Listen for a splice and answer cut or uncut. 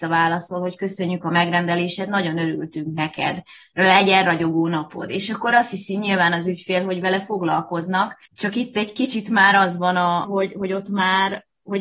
cut